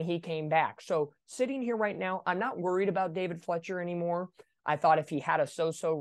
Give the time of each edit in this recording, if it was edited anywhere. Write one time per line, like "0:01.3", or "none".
none